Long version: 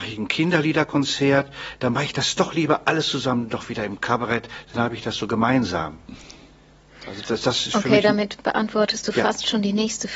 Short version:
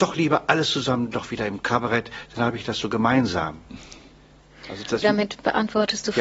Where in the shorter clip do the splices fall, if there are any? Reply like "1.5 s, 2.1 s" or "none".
5.0 s